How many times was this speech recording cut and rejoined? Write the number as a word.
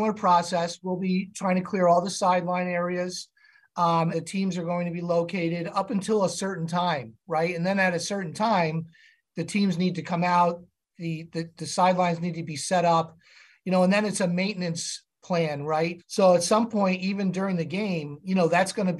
three